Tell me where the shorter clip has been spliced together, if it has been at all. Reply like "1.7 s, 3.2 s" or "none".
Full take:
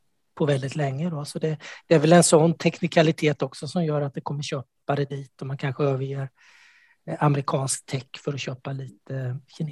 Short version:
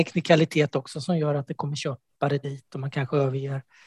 none